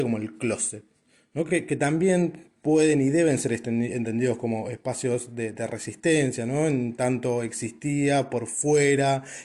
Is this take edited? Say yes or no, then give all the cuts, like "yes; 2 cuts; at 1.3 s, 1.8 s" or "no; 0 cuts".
no; 0 cuts